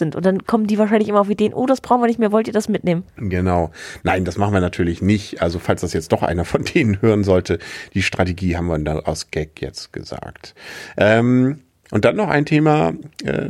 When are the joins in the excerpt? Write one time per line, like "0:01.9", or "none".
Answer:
none